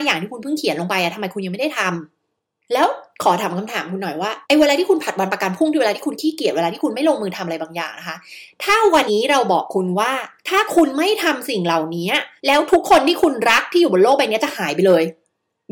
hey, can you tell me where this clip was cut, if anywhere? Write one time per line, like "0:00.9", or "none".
0:04.4
0:09.1
0:12.4